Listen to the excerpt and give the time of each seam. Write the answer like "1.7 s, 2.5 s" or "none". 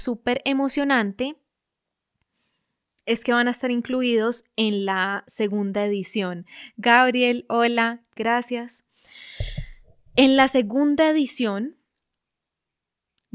8.2 s